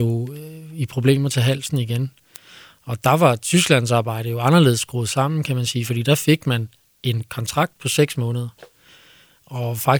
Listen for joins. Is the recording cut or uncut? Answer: uncut